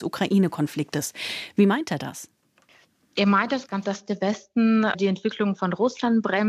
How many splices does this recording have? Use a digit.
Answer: 1